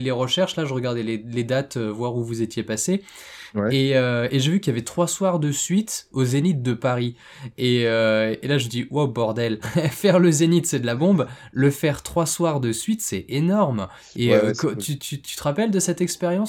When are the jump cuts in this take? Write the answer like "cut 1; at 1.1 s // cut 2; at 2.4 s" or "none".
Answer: cut 1; at 9.6 s